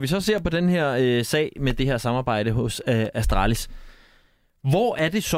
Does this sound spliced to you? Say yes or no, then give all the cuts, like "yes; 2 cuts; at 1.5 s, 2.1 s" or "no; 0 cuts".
no; 0 cuts